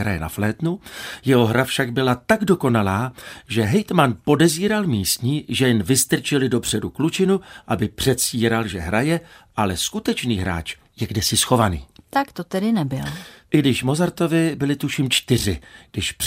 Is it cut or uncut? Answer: cut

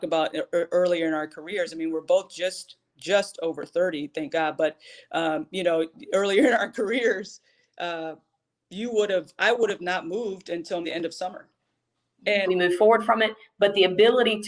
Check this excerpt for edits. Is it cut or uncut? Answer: cut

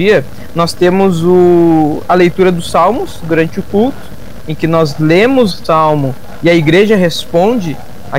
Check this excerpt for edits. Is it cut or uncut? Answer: cut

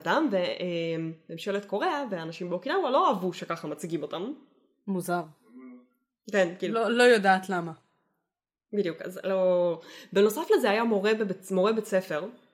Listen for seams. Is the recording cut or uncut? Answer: uncut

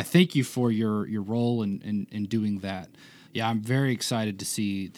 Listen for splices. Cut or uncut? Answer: cut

